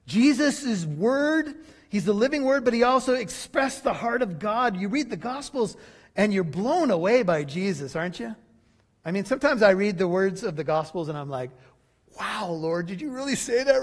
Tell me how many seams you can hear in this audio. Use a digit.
0